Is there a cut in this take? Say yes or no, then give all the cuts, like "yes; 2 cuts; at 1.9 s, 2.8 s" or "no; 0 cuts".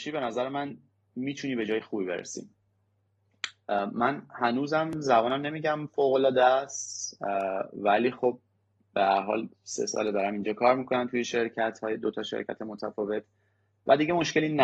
no; 0 cuts